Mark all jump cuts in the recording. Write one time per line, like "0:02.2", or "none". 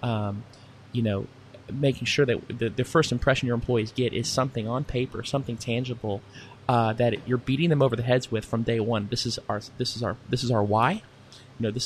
none